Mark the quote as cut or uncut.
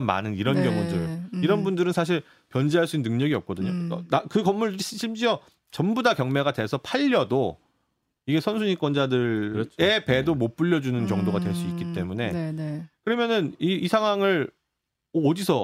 uncut